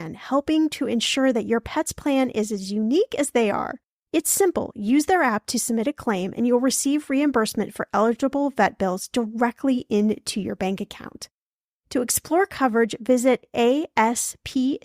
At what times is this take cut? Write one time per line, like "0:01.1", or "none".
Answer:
0:04.1